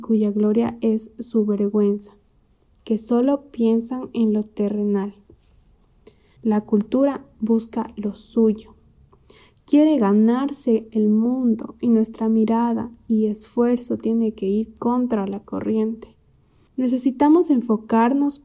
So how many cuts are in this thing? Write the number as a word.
two